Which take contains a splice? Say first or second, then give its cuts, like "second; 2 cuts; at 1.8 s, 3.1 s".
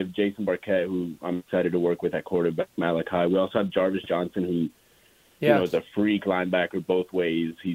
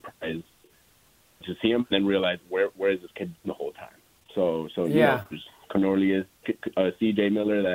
second; 1 cut; at 1.4 s